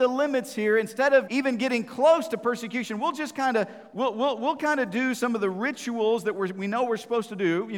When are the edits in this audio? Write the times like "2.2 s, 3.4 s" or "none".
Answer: 1.3 s